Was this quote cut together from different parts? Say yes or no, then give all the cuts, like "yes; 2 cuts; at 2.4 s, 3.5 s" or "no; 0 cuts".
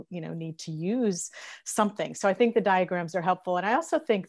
no; 0 cuts